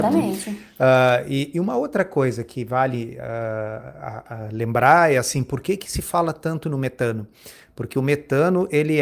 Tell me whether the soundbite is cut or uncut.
uncut